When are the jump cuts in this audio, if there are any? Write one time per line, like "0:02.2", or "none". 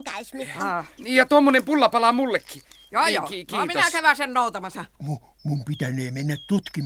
0:01.0
0:04.9